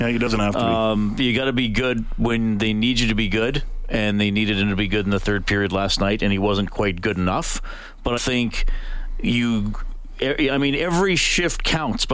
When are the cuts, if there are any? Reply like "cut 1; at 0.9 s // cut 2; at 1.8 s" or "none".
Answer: cut 1; at 8.2 s